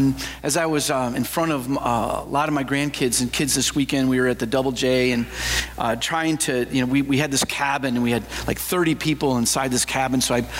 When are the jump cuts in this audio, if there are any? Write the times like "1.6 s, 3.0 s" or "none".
none